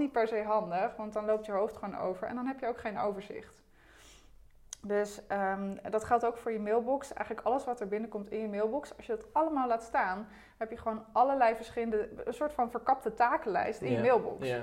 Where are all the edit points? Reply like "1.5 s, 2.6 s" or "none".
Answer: none